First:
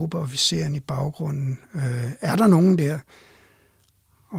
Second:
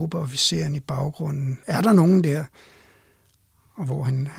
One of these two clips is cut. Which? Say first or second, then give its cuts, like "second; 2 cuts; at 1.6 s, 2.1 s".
second; 1 cut; at 1.6 s